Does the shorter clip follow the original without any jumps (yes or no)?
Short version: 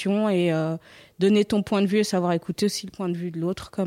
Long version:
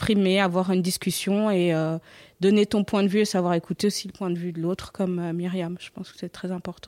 yes